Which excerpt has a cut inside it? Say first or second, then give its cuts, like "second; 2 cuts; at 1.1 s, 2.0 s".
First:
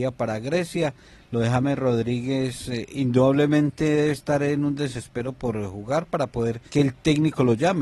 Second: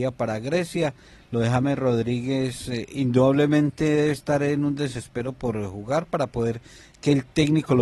first; 1 cut; at 6.7 s